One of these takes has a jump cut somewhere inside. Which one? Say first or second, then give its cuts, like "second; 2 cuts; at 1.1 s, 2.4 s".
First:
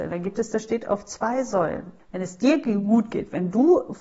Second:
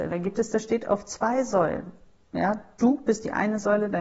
first; 1 cut; at 2.0 s